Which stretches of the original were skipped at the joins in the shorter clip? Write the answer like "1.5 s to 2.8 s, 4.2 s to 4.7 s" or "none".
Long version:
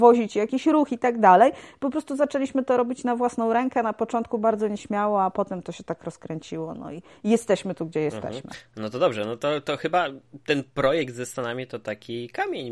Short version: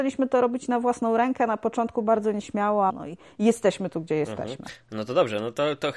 5.3 s to 6.7 s